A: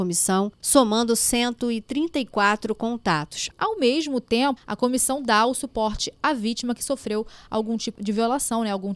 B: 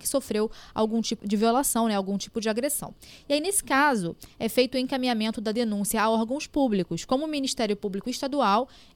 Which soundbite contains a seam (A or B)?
A